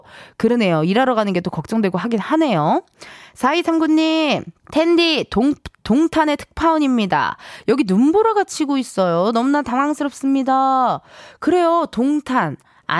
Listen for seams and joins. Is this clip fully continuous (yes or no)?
no